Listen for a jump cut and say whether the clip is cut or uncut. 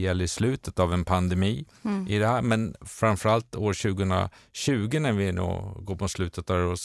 uncut